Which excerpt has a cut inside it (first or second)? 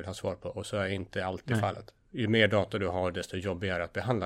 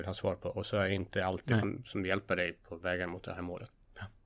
second